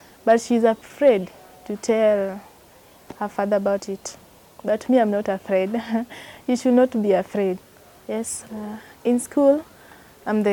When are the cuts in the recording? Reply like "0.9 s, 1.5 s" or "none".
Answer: 8.5 s